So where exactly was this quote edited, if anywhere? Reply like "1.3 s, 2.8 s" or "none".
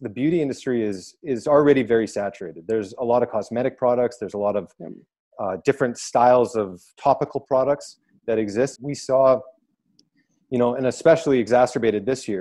8.8 s